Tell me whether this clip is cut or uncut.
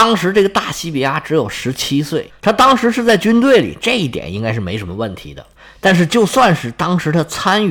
uncut